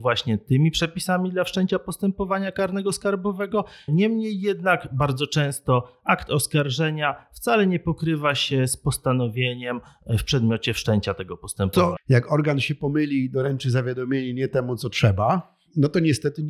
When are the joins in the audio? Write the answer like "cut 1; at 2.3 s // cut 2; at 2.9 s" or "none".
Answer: cut 1; at 3.9 s // cut 2; at 12.0 s